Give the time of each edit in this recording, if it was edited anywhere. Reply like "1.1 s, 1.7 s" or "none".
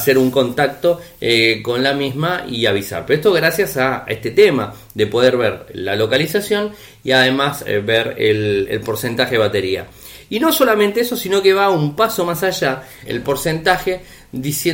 13.1 s